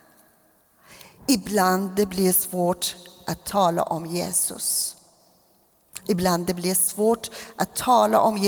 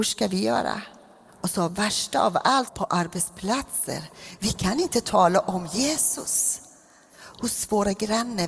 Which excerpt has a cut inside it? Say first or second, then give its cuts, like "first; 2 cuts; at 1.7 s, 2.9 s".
second; 2 cuts; at 2.7 s, 7.1 s